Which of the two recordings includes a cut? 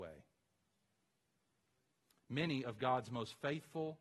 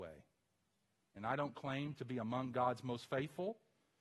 second; 1 cut; at 1.2 s

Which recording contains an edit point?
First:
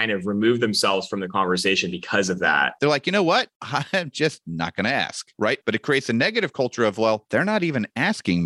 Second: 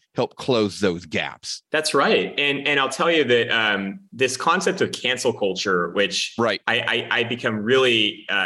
first; 2 cuts; at 2.8 s, 5.6 s

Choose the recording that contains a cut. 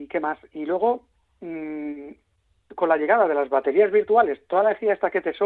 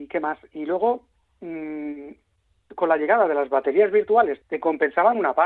second; 1 cut; at 4.4 s

